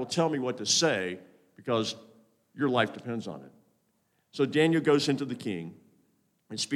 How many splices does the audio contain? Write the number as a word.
zero